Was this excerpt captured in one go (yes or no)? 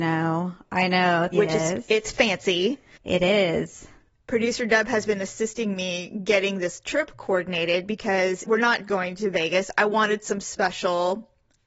no